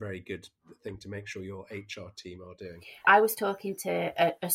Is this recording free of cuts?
no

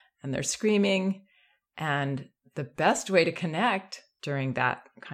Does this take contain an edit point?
no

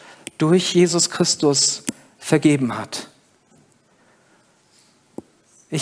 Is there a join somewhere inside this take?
no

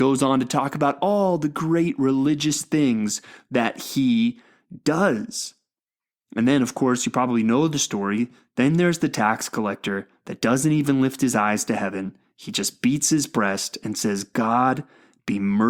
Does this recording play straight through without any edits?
yes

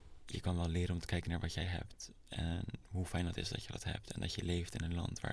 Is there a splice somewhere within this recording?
no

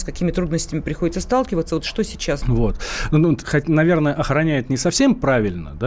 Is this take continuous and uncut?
no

